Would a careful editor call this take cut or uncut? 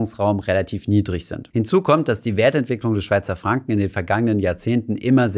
cut